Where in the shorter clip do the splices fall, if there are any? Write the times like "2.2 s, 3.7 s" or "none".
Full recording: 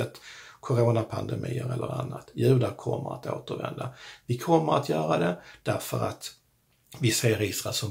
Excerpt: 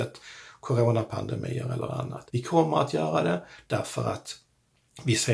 2.3 s